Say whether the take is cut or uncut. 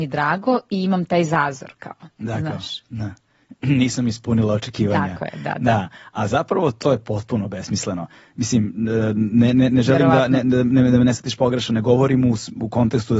uncut